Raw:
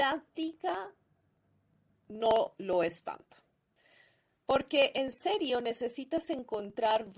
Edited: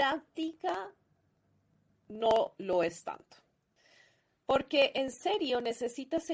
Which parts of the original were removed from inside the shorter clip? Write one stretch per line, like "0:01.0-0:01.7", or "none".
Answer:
none